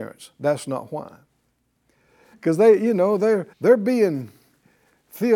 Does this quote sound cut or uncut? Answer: cut